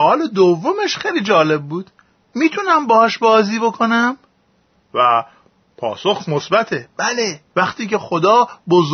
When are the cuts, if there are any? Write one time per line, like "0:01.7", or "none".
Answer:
0:04.8
0:07.5